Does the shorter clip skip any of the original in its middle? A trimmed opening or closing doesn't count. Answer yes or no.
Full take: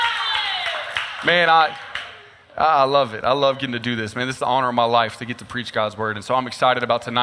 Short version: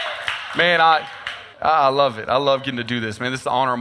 yes